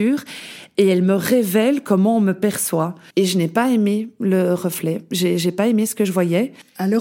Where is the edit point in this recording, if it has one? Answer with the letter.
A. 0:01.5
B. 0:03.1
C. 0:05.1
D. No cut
B